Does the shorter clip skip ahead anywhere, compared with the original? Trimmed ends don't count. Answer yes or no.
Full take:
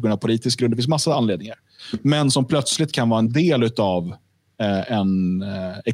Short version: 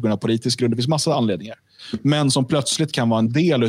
no